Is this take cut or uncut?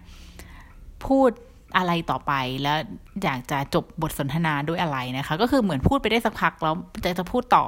uncut